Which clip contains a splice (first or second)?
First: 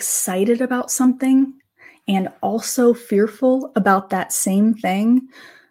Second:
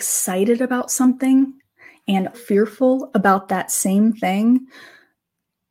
second